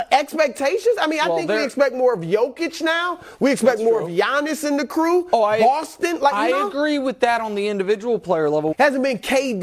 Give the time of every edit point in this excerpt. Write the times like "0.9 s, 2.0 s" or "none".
8.7 s

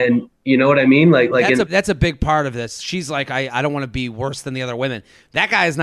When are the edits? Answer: 1.7 s

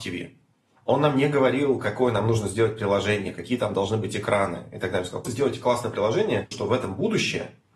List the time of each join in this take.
5.2 s, 6.5 s

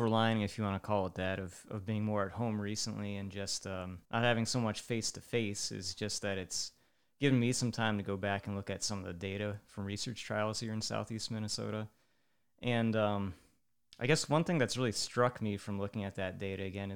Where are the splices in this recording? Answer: 4.0 s

